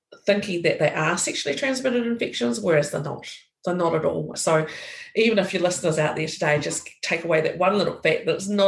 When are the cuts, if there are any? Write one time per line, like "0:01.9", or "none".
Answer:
0:04.3